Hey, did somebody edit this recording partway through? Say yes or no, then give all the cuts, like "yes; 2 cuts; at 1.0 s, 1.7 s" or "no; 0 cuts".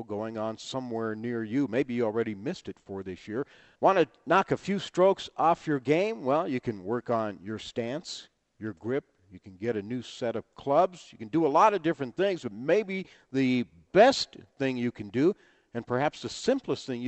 yes; 1 cut; at 3.8 s